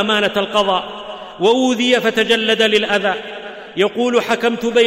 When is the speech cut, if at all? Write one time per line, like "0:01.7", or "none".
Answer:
none